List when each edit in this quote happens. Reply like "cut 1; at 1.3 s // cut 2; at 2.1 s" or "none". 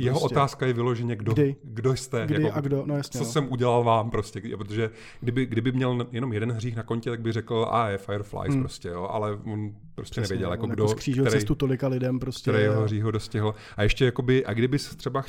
none